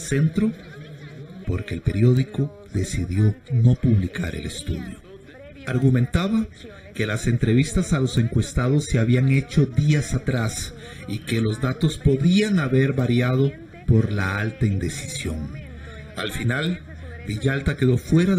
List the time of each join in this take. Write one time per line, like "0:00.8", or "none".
0:01.4